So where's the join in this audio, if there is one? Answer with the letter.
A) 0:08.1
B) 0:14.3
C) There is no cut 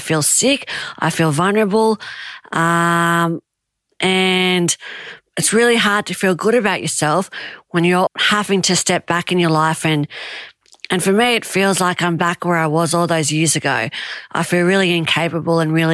A